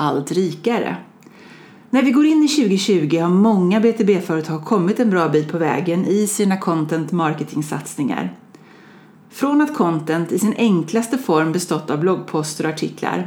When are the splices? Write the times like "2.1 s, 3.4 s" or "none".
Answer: none